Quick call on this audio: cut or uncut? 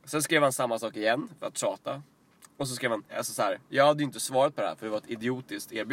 cut